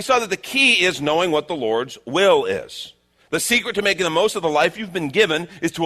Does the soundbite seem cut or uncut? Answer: uncut